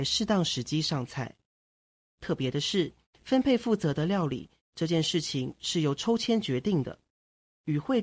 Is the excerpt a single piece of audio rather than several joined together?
no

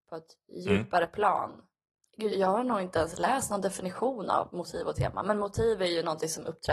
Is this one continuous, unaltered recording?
no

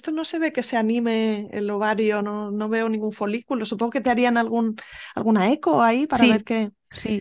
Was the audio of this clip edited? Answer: no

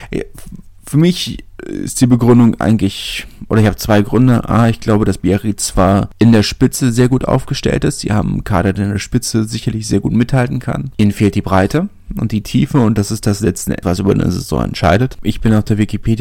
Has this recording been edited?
yes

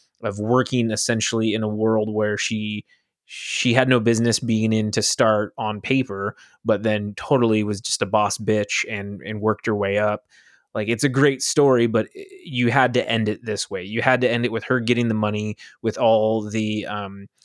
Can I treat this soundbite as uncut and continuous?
yes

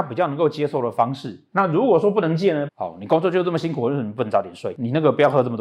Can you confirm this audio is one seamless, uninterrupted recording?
no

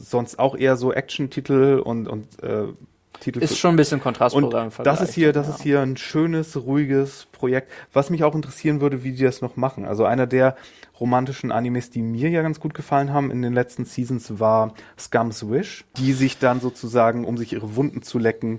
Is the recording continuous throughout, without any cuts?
no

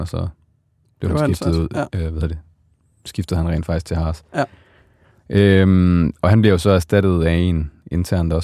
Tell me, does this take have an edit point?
no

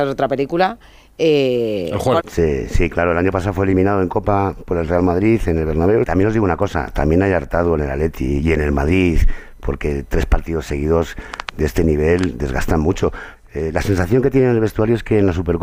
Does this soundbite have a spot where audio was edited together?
yes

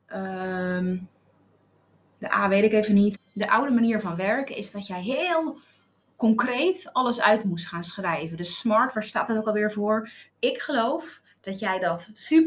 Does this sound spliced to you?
yes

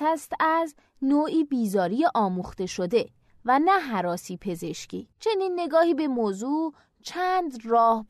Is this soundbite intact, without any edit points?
no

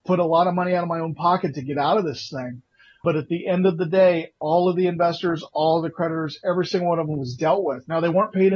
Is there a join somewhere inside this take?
no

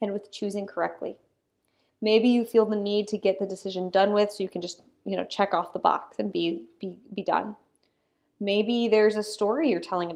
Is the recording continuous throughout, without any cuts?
yes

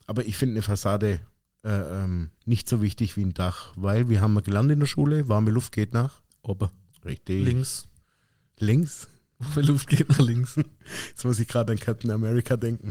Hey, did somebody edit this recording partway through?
yes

